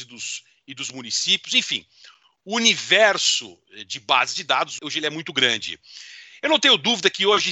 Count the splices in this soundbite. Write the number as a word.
one